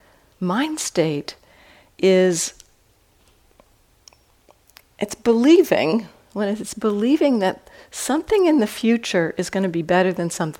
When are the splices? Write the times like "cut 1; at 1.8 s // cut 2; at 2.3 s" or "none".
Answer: none